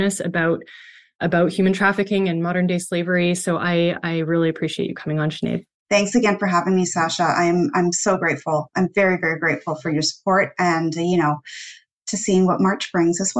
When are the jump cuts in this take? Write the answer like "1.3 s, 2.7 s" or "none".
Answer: 12.0 s

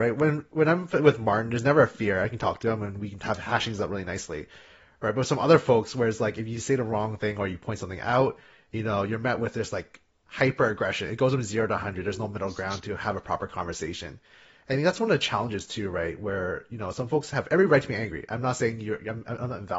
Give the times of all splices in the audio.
none

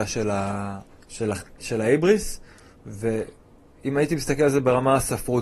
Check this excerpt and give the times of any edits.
none

